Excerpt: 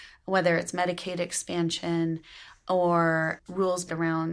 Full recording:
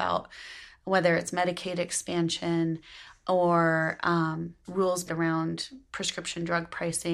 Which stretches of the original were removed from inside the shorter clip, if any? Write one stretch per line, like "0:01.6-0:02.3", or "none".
0:04.0-0:04.6